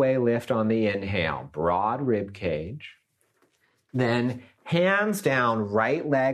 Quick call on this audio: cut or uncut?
uncut